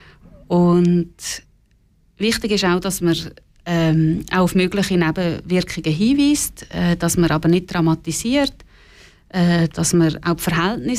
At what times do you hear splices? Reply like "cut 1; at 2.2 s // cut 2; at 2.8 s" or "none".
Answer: none